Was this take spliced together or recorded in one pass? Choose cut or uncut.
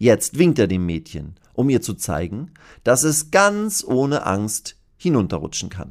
uncut